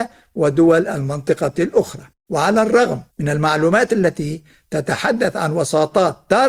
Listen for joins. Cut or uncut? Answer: cut